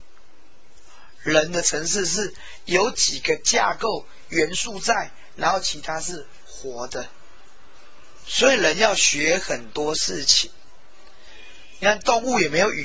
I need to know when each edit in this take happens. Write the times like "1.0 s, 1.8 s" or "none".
none